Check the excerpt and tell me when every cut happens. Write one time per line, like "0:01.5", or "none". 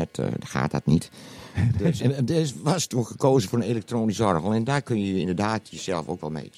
0:02.0